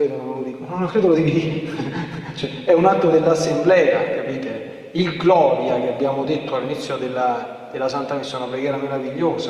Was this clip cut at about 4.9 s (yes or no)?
no